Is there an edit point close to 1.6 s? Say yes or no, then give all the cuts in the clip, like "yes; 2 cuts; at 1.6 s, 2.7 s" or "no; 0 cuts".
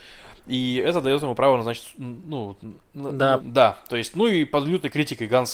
no; 1 cut; at 3.4 s